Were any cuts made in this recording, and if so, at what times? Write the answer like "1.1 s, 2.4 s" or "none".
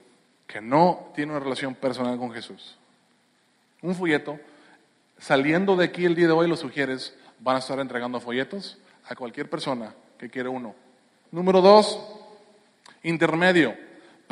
11.2 s